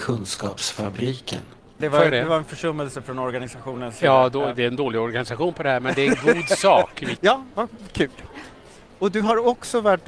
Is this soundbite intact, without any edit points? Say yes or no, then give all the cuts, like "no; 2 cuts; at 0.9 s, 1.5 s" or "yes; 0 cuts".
no; 2 cuts; at 1.8 s, 7.2 s